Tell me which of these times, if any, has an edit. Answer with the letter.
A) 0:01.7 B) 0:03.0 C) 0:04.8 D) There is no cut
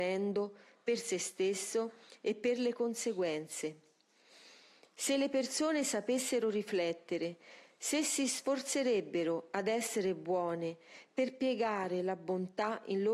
D